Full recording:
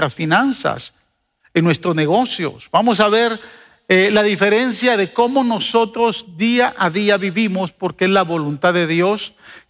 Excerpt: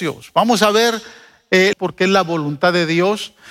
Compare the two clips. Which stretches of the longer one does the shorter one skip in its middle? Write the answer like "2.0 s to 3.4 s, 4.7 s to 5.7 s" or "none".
4.1 s to 7.7 s